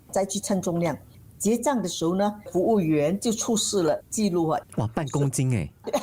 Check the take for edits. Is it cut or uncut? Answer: cut